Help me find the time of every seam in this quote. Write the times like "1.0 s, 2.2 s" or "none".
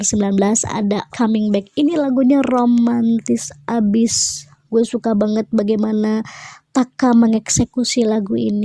1.1 s